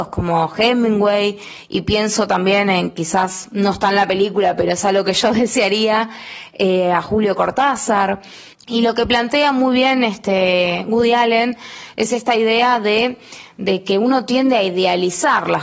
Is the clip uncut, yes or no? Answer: no